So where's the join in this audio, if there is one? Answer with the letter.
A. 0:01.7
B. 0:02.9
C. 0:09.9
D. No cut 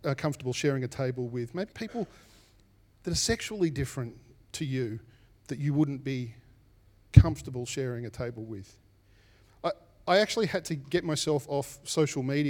A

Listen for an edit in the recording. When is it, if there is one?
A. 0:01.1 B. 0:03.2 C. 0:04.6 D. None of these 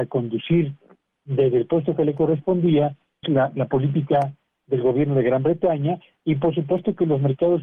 B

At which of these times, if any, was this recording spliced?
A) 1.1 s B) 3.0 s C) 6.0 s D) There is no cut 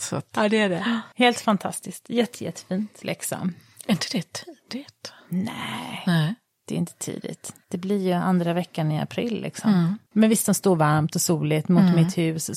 B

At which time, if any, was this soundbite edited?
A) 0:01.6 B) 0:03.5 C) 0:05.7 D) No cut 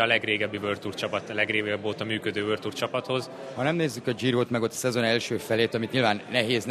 B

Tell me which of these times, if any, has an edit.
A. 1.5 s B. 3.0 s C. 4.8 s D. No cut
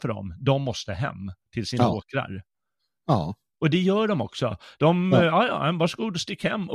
D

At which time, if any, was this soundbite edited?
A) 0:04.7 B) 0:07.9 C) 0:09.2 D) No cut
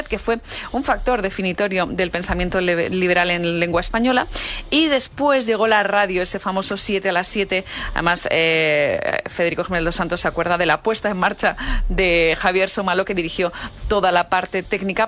D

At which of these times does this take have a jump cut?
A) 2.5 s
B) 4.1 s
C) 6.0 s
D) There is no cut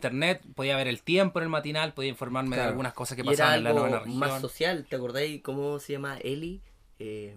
D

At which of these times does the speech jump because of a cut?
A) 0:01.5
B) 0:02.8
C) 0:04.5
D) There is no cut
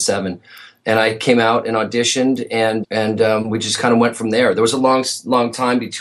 B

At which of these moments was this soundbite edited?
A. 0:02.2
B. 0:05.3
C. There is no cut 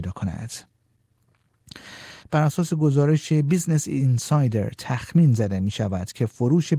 A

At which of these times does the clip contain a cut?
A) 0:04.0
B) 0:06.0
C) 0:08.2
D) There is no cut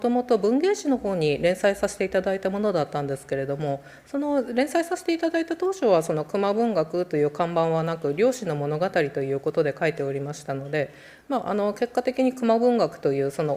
D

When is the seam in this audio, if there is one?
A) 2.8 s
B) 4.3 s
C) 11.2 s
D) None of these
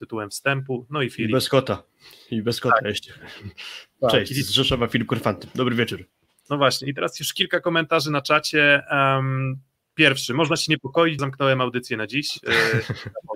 C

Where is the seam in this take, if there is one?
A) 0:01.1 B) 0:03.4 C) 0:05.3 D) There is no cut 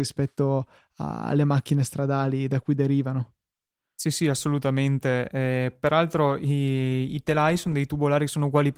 D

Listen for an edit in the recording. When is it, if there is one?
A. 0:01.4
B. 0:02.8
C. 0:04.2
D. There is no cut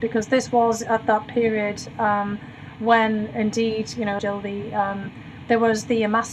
C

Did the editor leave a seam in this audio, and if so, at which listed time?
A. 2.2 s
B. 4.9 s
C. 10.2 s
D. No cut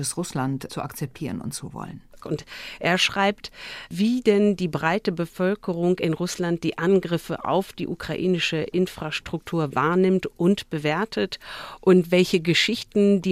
A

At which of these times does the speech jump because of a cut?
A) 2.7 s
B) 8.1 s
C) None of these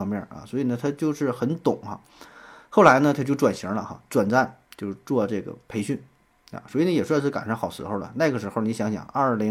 C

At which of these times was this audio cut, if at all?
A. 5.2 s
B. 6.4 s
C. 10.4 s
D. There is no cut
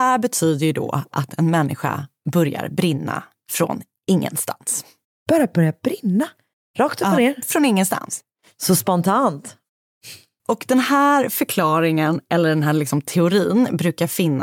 C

